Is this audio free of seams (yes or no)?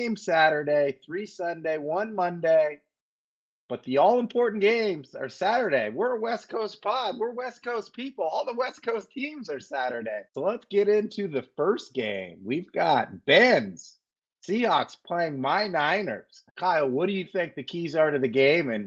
no